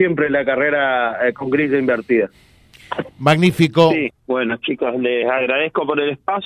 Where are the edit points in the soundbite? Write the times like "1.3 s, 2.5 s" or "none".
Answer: 4.1 s